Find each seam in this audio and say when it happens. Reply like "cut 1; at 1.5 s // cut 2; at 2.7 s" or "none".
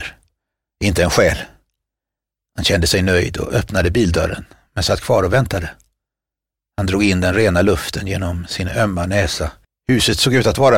cut 1; at 9.6 s